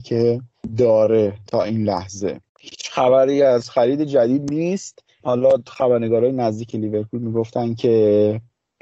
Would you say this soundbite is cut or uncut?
cut